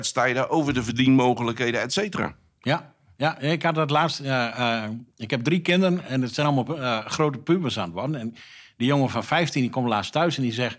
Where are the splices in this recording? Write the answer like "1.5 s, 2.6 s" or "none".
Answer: none